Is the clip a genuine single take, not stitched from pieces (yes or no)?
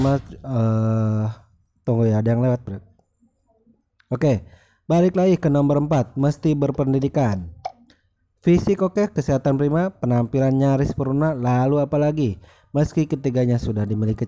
yes